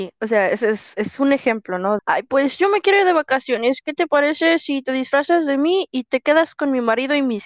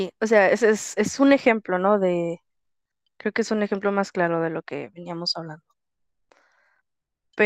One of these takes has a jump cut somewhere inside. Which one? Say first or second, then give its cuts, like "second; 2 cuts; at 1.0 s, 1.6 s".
first; 1 cut; at 2.0 s